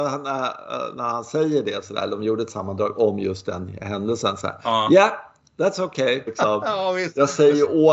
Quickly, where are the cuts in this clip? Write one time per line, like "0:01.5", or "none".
0:06.3